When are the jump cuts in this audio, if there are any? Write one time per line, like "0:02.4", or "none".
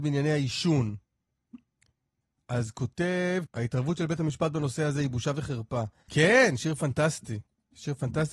0:03.5
0:06.1